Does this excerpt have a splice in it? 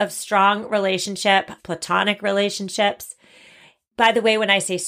yes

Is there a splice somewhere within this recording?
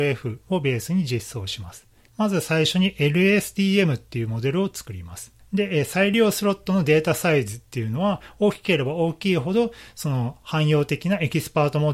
yes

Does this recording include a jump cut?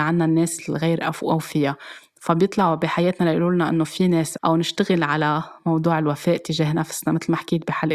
yes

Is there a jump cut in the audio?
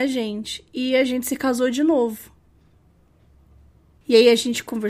yes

